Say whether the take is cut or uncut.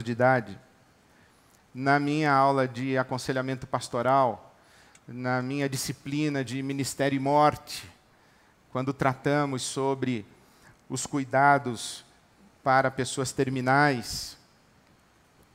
uncut